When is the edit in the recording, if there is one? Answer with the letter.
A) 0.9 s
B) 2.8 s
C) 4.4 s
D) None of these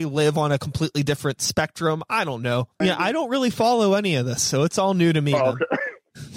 B